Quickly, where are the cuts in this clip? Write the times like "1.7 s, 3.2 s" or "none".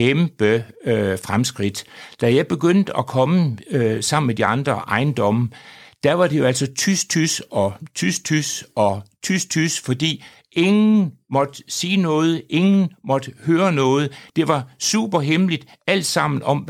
none